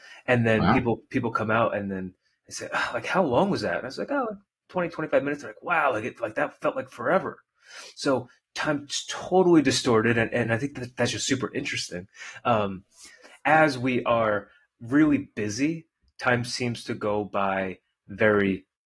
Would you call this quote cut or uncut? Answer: uncut